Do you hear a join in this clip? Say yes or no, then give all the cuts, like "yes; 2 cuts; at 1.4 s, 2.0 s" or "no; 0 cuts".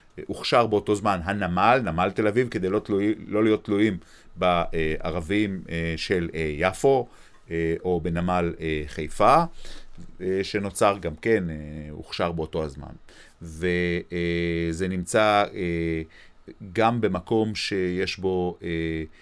no; 0 cuts